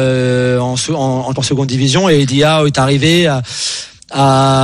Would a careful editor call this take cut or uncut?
cut